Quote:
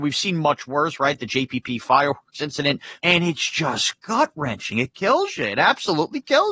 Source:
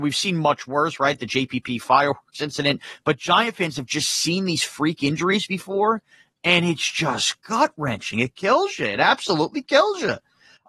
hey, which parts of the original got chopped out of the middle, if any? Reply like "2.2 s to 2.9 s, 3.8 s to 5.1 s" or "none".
3.0 s to 6.4 s